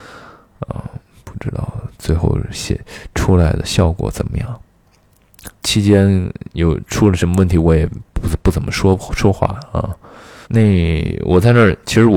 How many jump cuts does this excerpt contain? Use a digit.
2